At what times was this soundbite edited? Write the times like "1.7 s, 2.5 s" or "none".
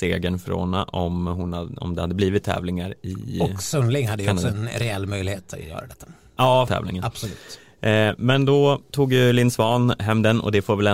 6.7 s